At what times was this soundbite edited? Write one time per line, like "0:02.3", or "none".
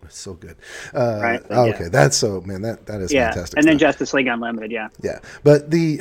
0:01.5